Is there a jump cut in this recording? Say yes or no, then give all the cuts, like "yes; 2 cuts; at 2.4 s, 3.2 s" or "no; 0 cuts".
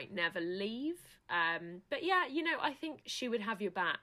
yes; 2 cuts; at 1.2 s, 3.0 s